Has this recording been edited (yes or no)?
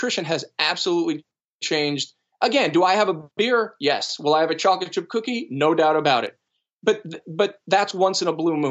no